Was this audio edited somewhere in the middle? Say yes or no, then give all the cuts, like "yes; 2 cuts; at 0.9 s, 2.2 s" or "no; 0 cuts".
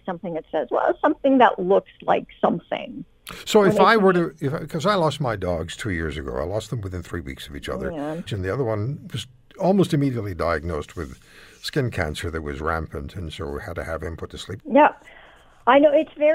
yes; 2 cuts; at 8.3 s, 14.6 s